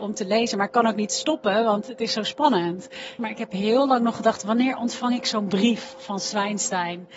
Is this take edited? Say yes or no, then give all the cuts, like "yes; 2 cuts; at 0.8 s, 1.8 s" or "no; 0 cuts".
yes; 1 cut; at 3.2 s